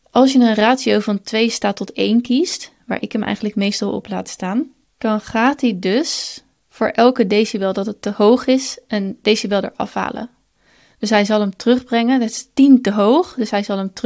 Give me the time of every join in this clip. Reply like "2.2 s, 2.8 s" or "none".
none